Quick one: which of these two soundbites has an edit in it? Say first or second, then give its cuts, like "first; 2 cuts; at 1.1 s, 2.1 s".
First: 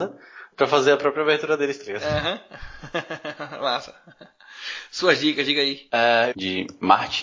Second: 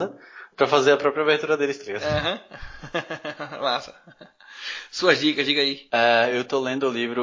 first; 1 cut; at 6.3 s